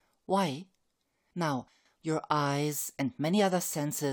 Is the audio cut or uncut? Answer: cut